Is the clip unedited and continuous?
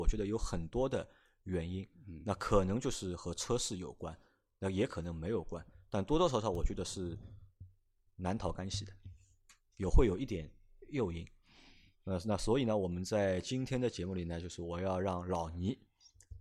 yes; 0 cuts

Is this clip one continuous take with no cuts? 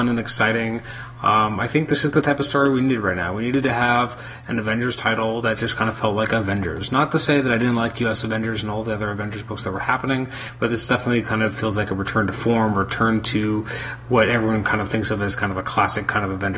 yes; 0 cuts

